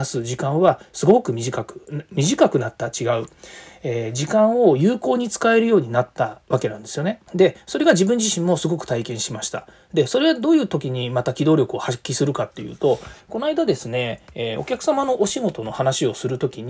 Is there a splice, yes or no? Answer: yes